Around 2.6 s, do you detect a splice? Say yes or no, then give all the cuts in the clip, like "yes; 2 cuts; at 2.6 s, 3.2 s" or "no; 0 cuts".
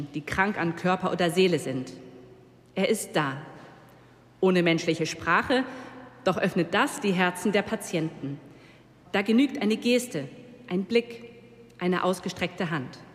no; 1 cut; at 9.0 s